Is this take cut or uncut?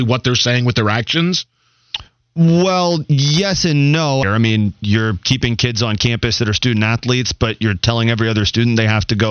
cut